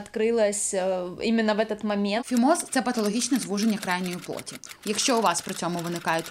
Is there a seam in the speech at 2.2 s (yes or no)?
yes